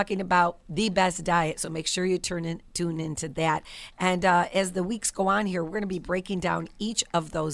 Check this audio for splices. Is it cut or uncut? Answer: uncut